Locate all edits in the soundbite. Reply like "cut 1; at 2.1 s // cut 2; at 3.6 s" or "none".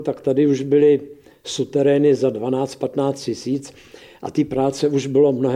none